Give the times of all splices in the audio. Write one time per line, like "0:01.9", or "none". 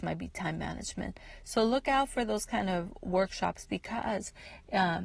none